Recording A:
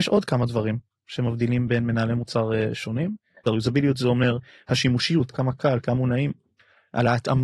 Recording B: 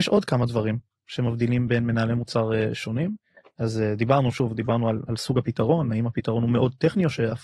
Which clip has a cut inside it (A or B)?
A